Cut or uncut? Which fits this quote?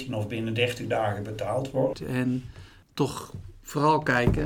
cut